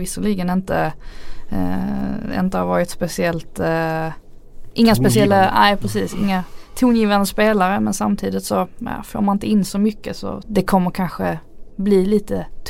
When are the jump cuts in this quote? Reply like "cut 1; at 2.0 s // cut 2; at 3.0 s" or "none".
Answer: cut 1; at 10.4 s